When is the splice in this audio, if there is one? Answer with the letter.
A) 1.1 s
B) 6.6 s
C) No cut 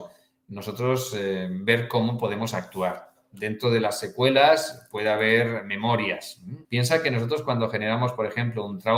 B